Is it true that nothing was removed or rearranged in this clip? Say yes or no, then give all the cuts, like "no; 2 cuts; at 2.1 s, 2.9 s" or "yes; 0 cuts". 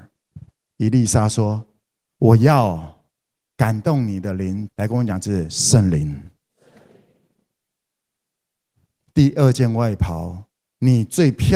no; 1 cut; at 4.7 s